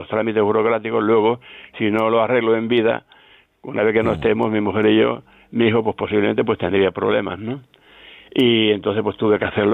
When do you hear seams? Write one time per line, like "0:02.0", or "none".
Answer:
none